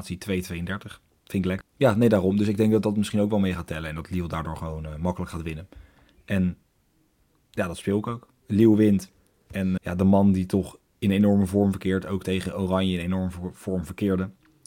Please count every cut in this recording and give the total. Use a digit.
3